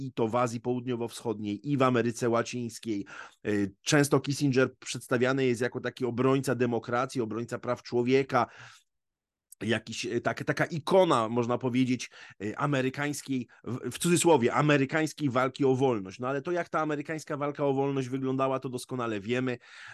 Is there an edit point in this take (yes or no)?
no